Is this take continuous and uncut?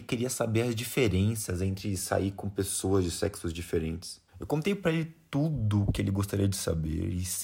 no; 1 cut; at 4.3 s

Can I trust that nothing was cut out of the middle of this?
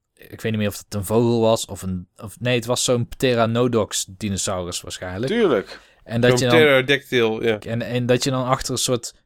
no; 1 cut; at 7.6 s

